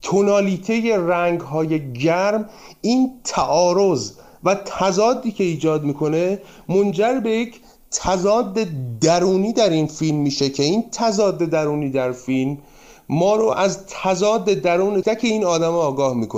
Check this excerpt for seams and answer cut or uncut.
cut